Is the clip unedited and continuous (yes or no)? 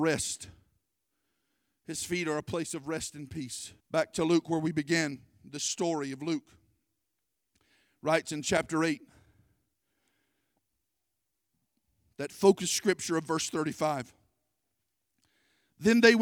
no